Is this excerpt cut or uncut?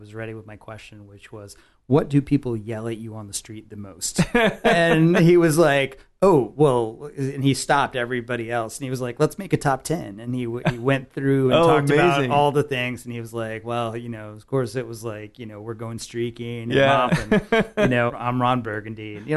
cut